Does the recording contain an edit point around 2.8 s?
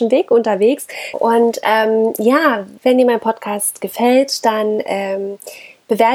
yes; 2 cuts; at 1.1 s, 2.8 s

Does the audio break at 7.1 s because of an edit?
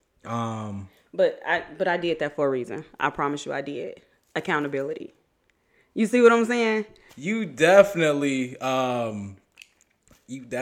yes; 1 cut; at 7.1 s

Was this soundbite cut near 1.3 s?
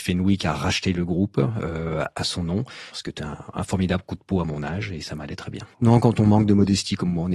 no; 2 cuts; at 2.9 s, 5.7 s

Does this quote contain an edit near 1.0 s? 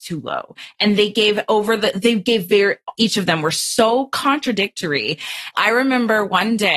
no; 2 cuts; at 2.9 s, 5.5 s

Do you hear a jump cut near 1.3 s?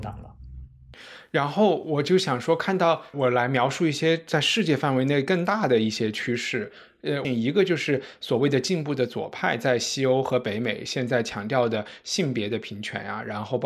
no; 2 cuts; at 3.1 s, 7.2 s

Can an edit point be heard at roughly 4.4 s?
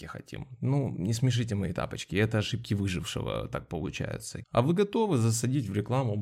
yes; 1 cut; at 4.4 s

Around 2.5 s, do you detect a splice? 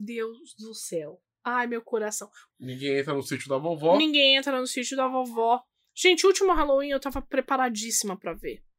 yes; 1 cut; at 2.5 s

